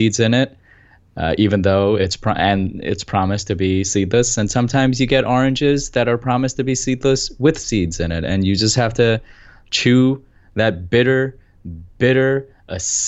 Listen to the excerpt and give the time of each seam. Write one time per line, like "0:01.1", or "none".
none

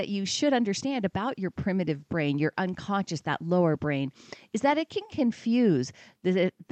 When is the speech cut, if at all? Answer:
none

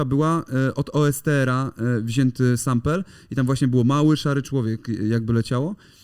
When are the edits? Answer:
none

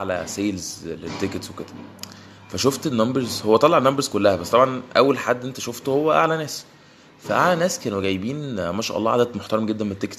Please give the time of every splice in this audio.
none

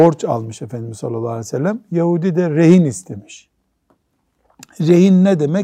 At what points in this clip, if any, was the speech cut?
none

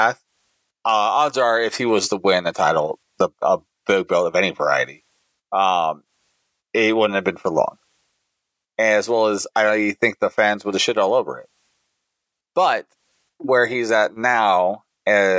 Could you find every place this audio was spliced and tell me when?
none

